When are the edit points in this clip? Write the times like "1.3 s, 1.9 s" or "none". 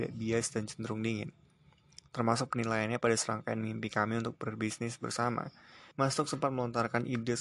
5.9 s